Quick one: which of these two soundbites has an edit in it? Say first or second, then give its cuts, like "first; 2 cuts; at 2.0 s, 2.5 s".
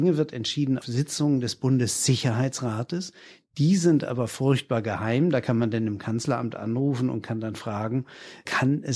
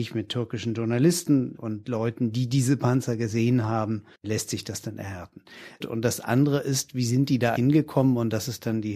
second; 3 cuts; at 4.1 s, 5.8 s, 7.6 s